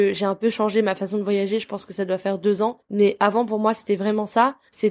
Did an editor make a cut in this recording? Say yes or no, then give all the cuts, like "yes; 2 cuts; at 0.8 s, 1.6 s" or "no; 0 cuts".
no; 0 cuts